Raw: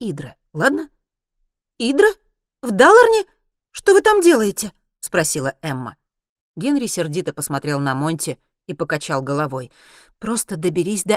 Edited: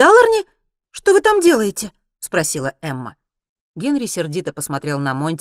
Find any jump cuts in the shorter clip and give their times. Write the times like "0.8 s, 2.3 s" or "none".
none